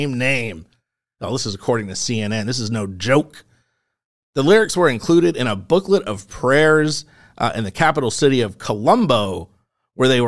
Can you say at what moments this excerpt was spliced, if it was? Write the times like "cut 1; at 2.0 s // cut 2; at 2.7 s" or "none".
none